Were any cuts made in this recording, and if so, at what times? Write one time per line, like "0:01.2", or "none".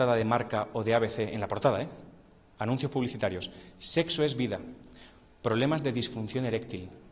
none